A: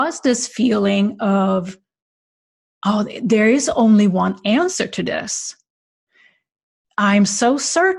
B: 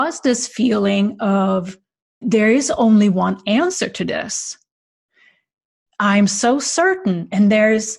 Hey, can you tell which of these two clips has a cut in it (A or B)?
B